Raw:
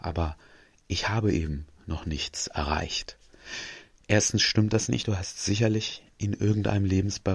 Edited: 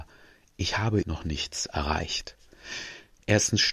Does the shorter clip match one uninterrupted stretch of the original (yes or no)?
no